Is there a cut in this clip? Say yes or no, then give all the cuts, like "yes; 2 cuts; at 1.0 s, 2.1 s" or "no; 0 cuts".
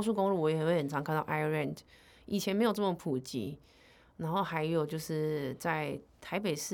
no; 0 cuts